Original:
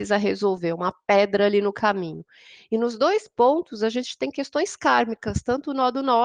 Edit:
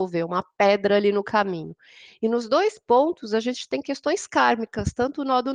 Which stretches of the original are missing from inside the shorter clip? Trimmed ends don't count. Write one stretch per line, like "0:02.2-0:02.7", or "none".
none